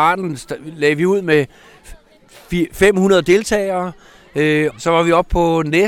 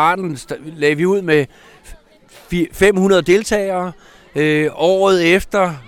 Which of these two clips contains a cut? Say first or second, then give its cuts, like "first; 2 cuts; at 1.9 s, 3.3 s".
first; 1 cut; at 4.7 s